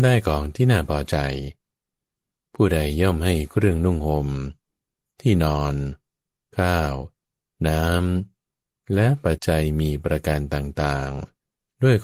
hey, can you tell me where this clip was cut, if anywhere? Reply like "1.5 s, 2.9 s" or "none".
9.4 s

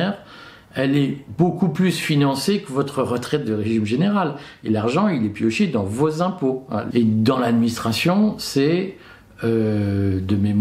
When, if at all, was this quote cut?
6.9 s

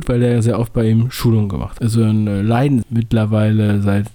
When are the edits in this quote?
1.8 s, 2.8 s

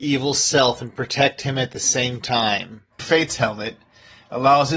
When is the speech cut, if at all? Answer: 3.0 s

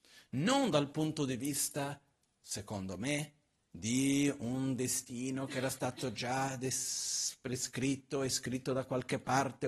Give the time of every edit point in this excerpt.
none

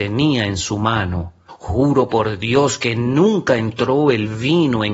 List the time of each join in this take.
1.5 s

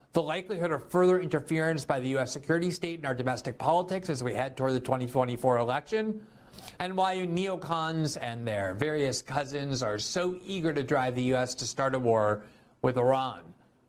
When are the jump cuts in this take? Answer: 6.8 s

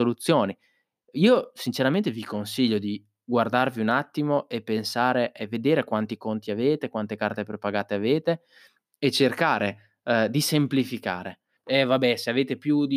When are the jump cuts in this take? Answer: 11.6 s

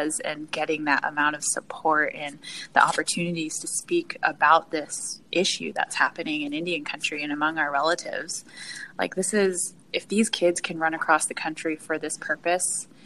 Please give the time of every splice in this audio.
8.9 s

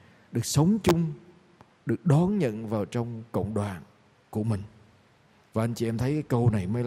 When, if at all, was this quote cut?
5.5 s

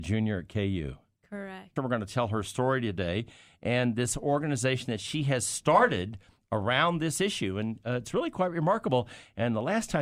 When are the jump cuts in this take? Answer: 1.8 s

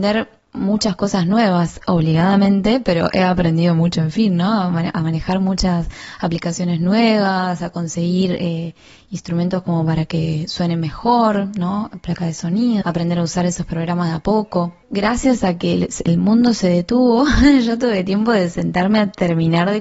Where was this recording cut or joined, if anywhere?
12.8 s, 14.8 s

